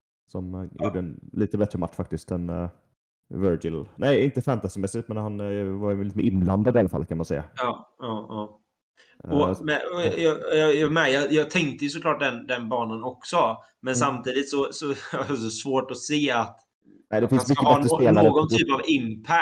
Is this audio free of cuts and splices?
yes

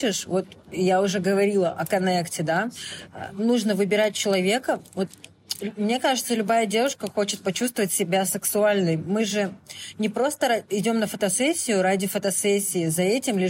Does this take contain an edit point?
no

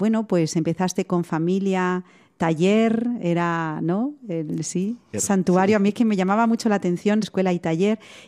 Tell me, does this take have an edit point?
yes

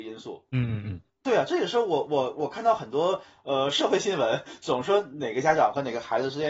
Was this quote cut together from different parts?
yes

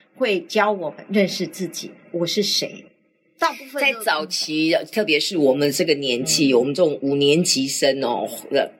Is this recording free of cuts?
yes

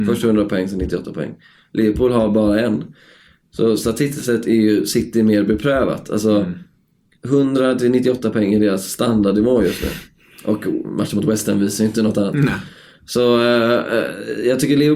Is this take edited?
no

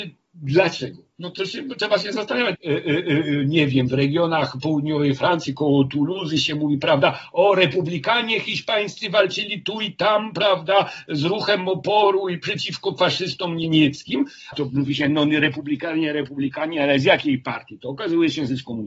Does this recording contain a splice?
yes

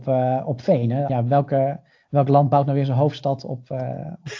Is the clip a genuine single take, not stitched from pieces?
no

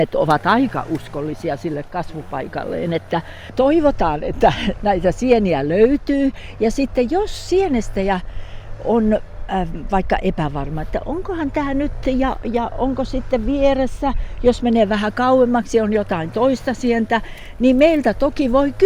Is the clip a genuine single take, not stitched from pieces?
yes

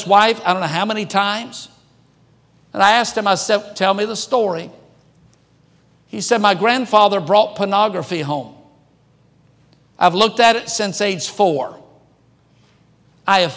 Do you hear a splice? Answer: no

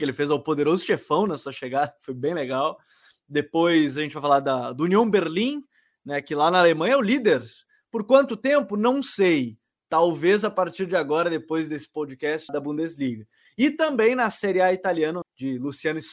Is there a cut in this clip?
yes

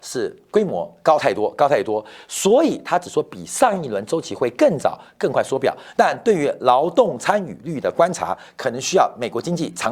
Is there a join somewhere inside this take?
yes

